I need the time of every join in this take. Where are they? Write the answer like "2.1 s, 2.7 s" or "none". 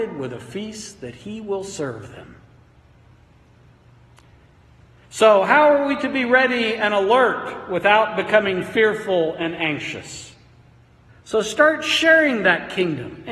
11.1 s

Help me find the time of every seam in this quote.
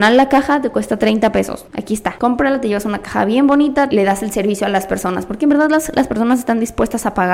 3.9 s

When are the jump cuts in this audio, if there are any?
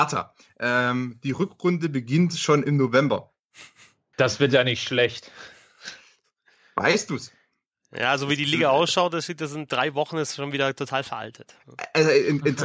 4.1 s

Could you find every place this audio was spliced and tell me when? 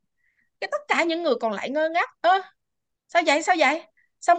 2.2 s

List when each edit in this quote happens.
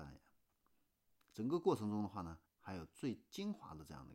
2.5 s

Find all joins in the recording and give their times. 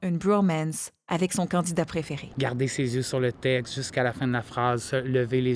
2.3 s

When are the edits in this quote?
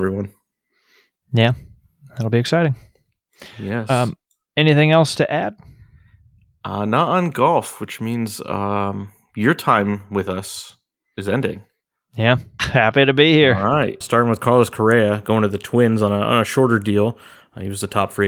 12.6 s, 14.0 s

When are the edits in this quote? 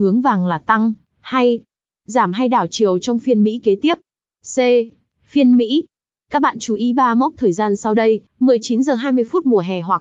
8.3 s

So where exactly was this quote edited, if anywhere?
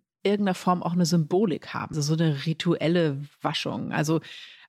1.9 s

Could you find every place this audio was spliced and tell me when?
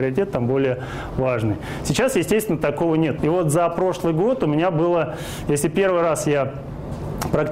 3.2 s

